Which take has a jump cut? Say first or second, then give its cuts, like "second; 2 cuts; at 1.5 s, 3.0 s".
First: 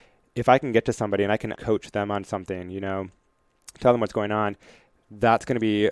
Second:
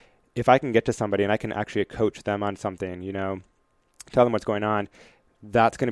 first; 1 cut; at 1.5 s